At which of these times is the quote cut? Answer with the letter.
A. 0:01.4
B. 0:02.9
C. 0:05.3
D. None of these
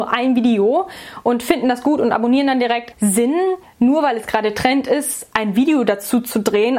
B